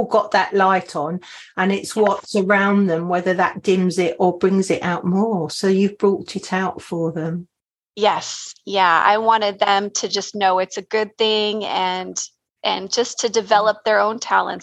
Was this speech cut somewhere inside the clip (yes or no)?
no